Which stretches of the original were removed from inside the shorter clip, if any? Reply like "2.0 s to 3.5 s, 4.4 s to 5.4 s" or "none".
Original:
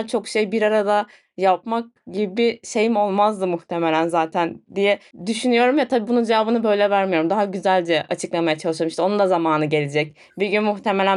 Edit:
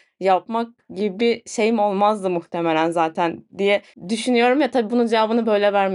none